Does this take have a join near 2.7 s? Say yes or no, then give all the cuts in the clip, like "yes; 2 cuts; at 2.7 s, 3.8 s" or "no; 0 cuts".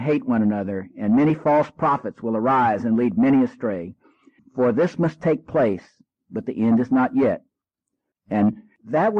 no; 2 cuts; at 4.4 s, 8.1 s